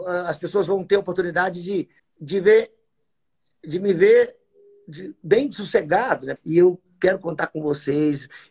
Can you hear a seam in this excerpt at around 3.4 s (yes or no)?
no